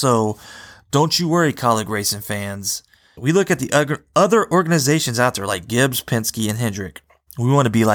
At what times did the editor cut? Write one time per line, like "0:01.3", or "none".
0:03.2